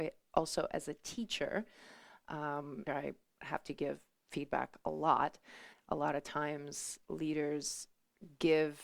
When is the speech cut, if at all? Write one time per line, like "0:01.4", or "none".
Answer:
0:02.9
0:05.7